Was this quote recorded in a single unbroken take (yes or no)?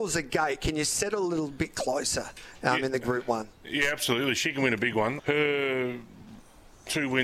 no